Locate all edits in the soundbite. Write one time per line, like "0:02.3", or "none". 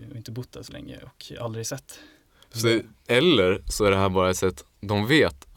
none